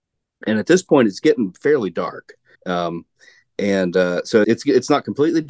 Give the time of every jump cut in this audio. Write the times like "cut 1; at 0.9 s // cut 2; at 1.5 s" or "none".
cut 1; at 2.5 s // cut 2; at 4.4 s